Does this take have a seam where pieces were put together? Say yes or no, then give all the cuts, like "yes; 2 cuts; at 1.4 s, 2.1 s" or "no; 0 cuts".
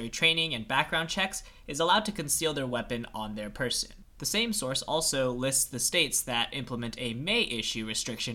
no; 0 cuts